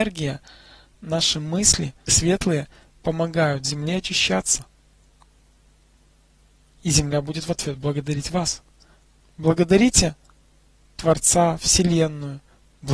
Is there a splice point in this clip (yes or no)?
yes